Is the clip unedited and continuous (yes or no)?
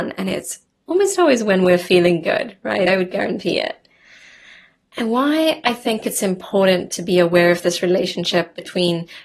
yes